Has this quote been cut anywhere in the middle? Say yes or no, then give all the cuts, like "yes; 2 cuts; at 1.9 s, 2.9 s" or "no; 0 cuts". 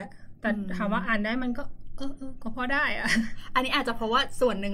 yes; 1 cut; at 1.4 s